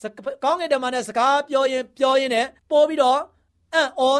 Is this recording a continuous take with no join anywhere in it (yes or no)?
no